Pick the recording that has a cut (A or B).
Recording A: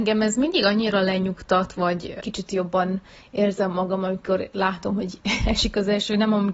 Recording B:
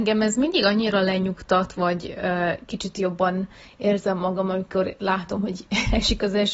A